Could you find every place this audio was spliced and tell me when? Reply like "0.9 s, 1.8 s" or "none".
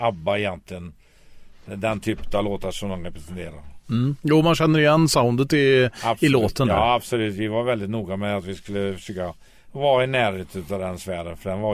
none